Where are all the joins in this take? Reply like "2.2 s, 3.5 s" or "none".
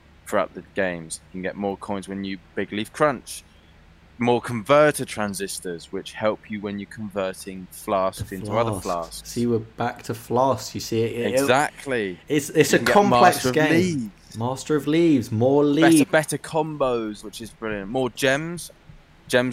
16.0 s, 17.2 s